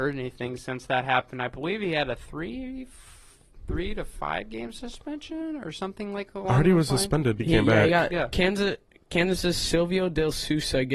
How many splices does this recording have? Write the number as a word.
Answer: one